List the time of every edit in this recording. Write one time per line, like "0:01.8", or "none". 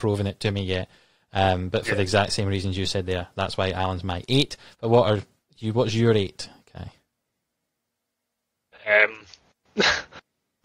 none